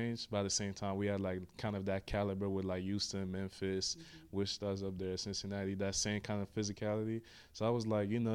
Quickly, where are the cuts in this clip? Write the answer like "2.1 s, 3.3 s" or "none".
none

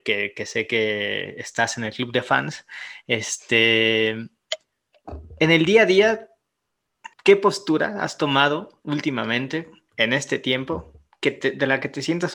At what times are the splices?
7.1 s

